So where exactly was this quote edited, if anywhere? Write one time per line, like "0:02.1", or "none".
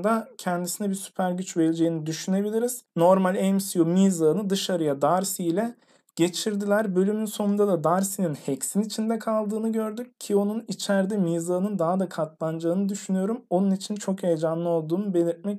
0:02.9